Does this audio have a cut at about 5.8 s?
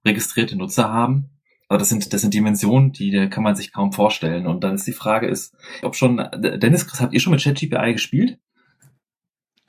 yes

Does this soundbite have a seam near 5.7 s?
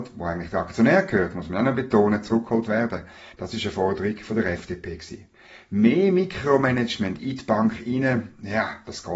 no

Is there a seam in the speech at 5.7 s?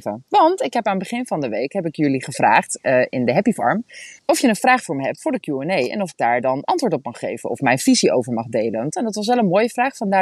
no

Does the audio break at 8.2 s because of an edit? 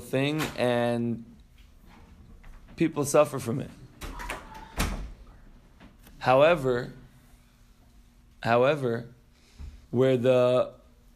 no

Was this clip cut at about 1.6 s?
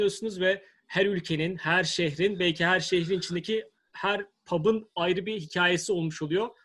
no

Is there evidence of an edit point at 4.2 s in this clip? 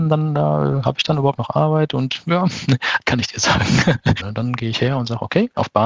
yes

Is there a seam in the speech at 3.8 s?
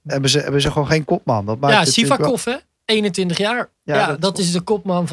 yes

